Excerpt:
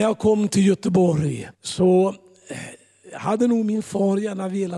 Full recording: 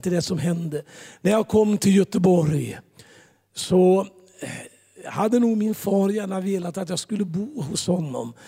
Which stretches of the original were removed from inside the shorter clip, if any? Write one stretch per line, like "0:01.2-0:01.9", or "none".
0:02.8-0:03.5